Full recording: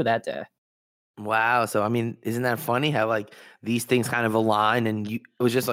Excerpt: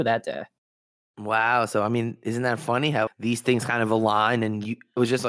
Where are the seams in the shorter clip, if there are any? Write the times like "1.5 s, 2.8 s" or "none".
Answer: 3.1 s